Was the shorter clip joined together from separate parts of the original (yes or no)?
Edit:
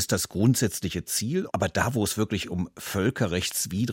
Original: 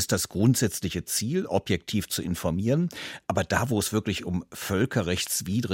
yes